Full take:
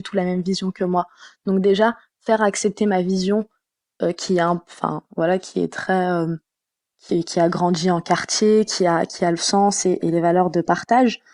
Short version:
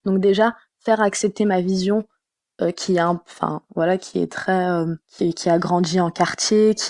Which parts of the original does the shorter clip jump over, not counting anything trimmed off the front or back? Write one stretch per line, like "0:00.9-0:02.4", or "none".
0:06.4-0:06.9